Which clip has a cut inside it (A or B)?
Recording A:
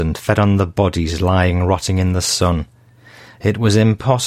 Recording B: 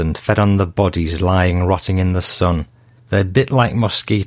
B